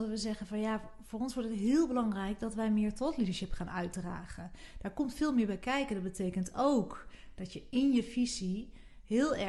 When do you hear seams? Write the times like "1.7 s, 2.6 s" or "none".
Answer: none